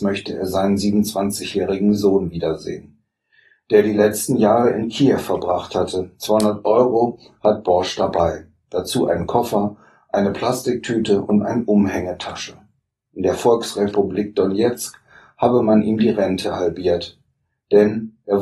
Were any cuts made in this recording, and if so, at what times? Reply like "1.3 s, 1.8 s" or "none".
none

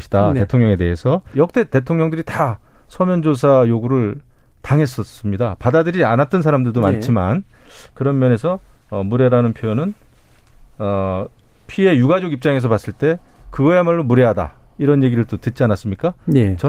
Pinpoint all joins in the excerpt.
1.3 s

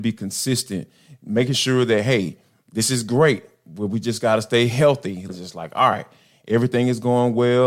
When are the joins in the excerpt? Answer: 5.3 s

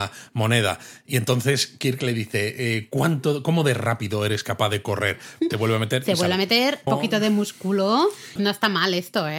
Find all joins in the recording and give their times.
5.5 s, 6.9 s, 8.4 s

